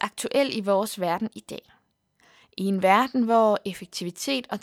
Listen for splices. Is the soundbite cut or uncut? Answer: uncut